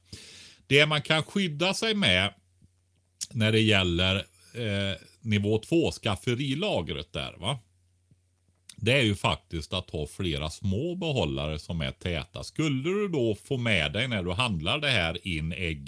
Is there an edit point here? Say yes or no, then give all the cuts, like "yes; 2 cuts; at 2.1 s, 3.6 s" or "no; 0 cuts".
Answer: no; 0 cuts